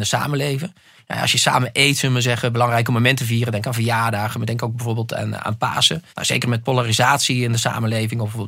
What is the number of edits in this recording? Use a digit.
1